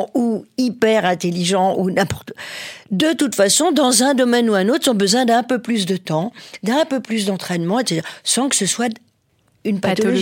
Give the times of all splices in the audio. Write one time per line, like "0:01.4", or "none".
none